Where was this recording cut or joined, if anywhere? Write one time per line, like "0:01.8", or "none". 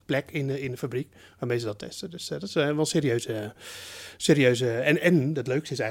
none